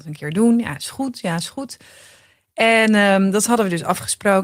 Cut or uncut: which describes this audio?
uncut